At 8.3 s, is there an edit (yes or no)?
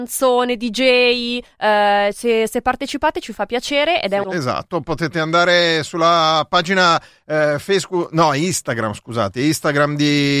no